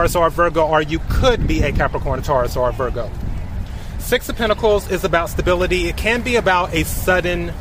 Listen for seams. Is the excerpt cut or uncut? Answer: uncut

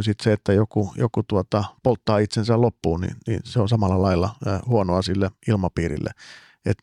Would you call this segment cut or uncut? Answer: uncut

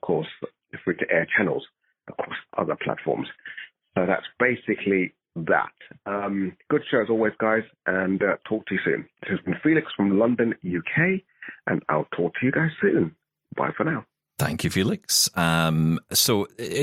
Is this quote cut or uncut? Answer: uncut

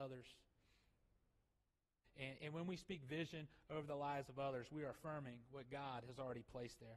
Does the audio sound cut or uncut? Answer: cut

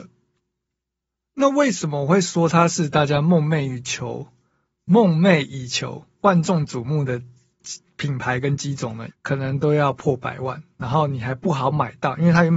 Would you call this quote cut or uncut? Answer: cut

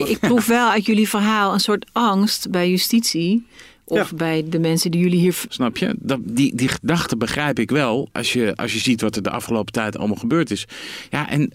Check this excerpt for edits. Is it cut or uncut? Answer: cut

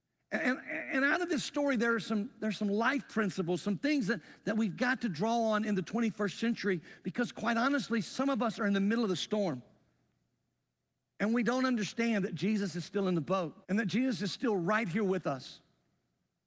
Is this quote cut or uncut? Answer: cut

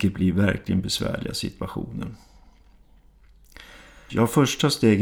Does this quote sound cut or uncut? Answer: cut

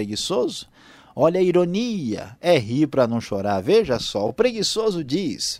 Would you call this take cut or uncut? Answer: uncut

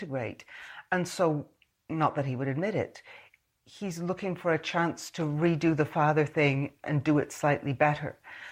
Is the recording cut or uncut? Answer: uncut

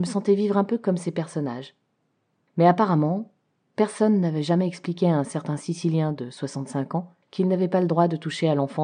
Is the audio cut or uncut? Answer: uncut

